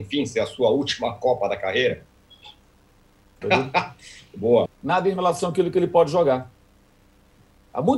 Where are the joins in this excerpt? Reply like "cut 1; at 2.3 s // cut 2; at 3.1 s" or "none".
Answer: cut 1; at 3.4 s // cut 2; at 4.7 s